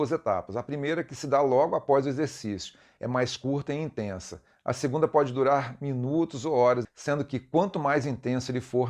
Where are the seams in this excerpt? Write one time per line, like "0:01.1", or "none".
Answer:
0:06.8